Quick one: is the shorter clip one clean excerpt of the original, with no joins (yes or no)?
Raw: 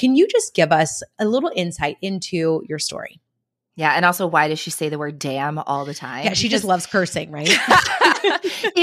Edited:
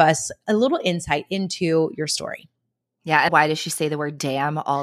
no